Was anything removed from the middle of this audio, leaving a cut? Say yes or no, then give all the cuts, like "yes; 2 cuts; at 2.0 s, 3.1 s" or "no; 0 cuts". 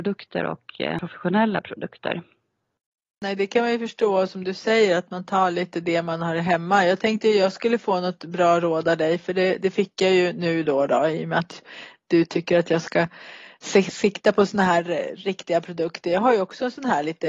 no; 0 cuts